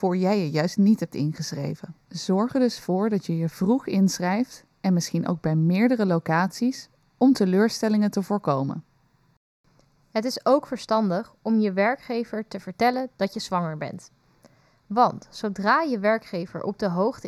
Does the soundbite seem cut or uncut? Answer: cut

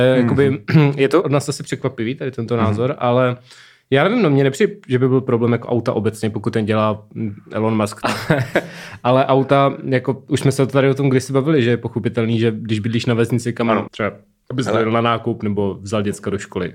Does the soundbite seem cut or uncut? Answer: cut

